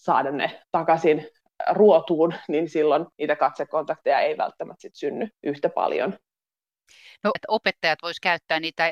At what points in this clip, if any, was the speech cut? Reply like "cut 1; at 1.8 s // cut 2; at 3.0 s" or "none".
cut 1; at 3.1 s // cut 2; at 7.4 s